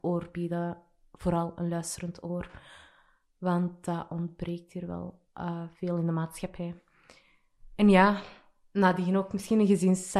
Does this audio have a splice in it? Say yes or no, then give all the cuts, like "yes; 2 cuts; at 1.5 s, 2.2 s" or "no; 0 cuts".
no; 0 cuts